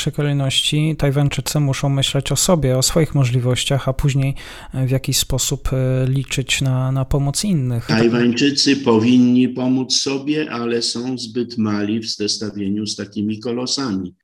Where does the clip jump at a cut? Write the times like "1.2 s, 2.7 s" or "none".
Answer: none